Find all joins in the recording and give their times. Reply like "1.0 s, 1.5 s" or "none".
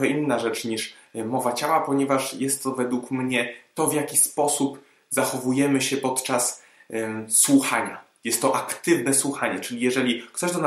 none